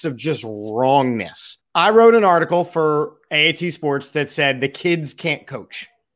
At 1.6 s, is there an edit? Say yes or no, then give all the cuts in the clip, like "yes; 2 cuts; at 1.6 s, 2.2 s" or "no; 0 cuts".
yes; 1 cut; at 1.6 s